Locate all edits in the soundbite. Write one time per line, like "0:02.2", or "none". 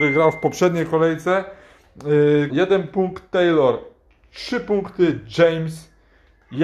0:02.5

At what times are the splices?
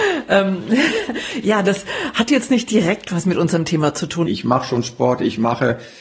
0:04.3

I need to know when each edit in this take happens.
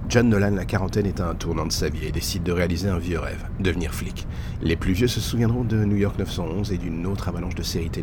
0:04.6

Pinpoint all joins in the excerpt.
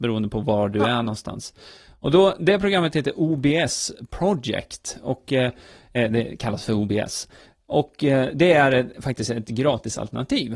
none

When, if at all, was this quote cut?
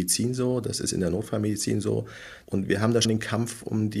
0:03.0

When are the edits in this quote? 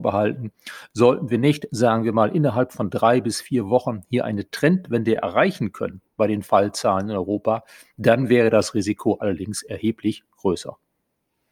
none

